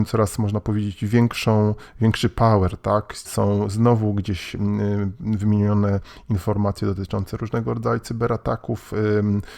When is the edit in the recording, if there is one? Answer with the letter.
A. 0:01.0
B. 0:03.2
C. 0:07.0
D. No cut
B